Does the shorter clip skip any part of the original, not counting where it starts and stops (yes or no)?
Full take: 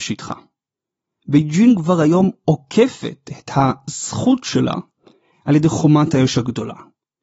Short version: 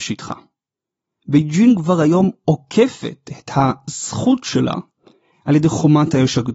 no